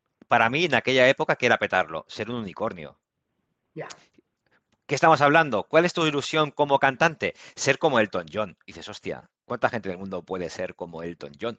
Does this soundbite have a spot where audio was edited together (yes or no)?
yes